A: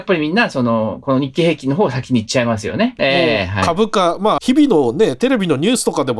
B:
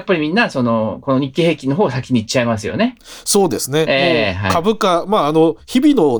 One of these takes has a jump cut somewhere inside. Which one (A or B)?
A